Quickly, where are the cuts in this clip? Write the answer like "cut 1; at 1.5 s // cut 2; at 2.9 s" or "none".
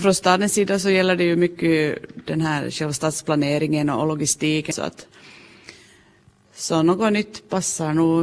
cut 1; at 4.7 s